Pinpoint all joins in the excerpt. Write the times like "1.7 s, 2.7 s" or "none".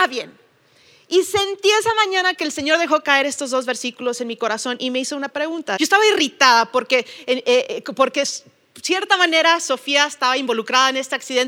5.8 s

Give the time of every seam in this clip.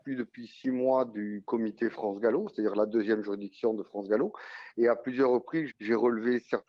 5.7 s

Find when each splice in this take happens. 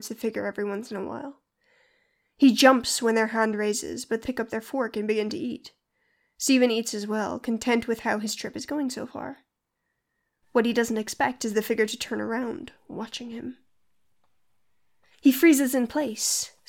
4.2 s

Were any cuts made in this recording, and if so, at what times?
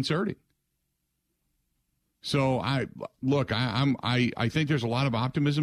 none

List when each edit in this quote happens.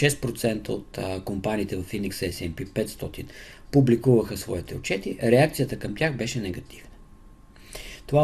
none

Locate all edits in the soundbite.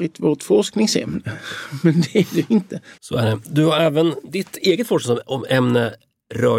3.0 s

